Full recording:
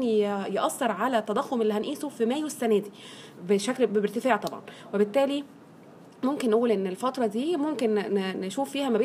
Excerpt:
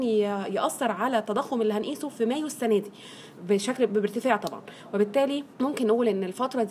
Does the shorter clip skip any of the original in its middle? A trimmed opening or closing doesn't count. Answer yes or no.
yes